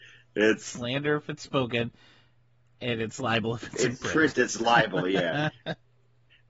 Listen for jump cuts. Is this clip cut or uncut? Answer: uncut